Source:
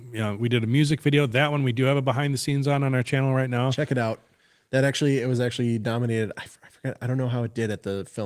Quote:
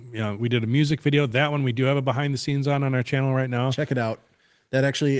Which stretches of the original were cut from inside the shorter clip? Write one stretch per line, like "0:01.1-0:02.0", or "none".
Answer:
none